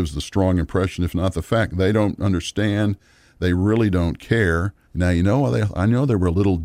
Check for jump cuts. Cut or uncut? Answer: cut